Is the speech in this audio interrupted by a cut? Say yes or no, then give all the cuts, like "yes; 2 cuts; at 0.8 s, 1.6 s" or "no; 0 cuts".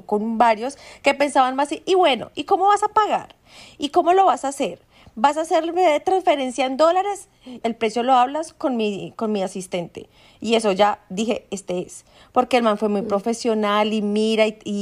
yes; 1 cut; at 7.6 s